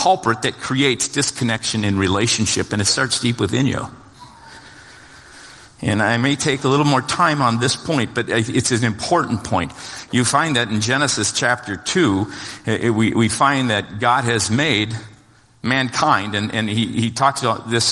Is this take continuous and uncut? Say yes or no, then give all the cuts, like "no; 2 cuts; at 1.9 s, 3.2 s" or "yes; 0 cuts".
no; 1 cut; at 10.1 s